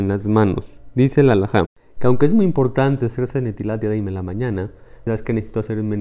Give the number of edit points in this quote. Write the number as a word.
one